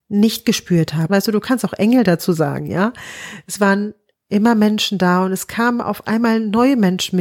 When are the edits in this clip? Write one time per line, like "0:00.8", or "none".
0:01.1